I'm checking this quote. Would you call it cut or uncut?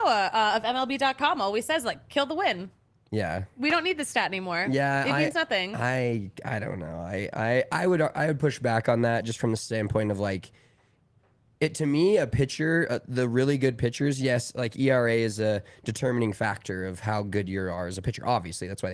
uncut